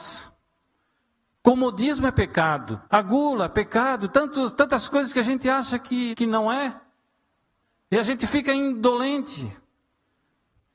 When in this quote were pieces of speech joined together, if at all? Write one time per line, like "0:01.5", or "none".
0:02.9
0:06.1